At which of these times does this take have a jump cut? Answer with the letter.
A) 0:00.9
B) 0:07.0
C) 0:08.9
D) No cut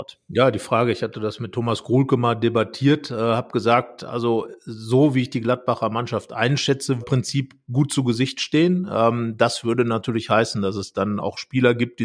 B